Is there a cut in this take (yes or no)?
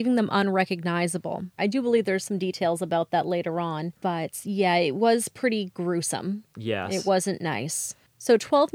yes